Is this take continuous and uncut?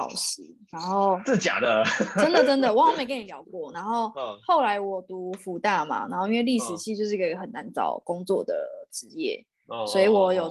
yes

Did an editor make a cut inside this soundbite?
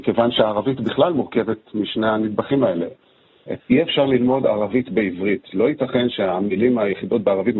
yes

